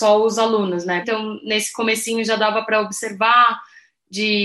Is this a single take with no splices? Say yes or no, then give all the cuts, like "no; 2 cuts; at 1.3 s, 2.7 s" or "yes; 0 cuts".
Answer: no; 1 cut; at 1.0 s